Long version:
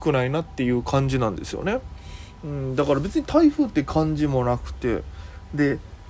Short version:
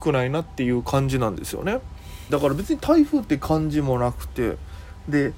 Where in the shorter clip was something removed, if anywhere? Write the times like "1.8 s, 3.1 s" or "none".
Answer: 2.3 s

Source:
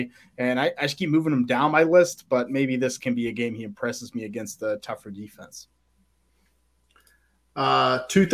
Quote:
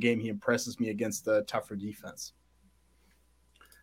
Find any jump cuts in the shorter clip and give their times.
none

